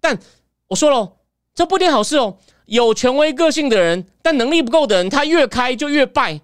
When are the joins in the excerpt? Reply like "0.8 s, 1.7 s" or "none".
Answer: none